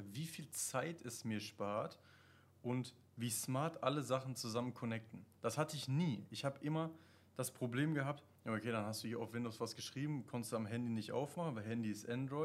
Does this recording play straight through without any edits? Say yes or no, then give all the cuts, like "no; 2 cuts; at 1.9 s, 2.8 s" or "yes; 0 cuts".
no; 1 cut; at 5.3 s